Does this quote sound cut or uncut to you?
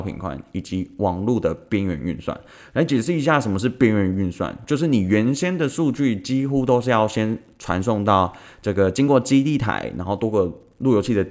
uncut